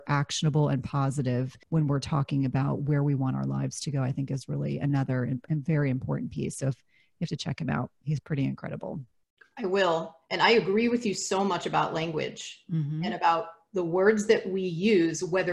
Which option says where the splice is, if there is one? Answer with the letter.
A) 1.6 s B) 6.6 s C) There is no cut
A